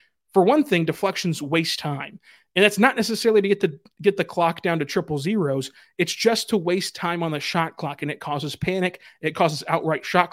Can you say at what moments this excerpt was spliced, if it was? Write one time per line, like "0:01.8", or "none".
none